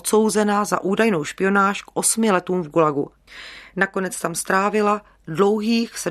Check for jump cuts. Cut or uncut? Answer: uncut